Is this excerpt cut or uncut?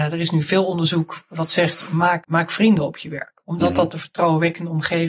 cut